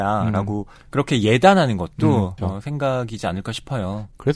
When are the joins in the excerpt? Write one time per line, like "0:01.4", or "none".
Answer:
0:02.4